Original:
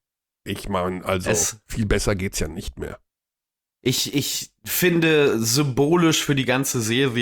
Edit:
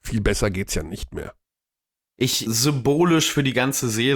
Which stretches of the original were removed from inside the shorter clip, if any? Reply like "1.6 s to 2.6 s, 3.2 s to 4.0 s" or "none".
4.1 s to 5.4 s